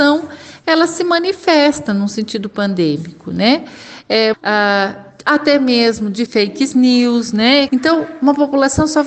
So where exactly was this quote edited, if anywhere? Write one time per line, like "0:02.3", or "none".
0:04.3
0:06.3
0:07.7